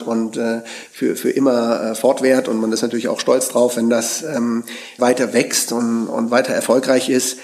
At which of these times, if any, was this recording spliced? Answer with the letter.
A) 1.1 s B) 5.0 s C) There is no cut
B